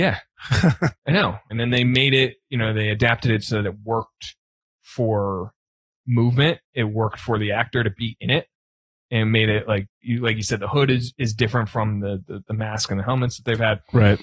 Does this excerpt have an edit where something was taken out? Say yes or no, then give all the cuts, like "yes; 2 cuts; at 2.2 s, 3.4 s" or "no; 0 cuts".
yes; 1 cut; at 1.5 s